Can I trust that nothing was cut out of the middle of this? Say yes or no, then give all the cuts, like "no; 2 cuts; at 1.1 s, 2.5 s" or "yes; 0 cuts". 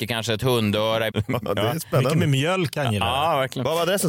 no; 1 cut; at 1.1 s